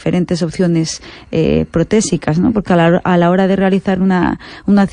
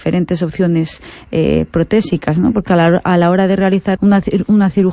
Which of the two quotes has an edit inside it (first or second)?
second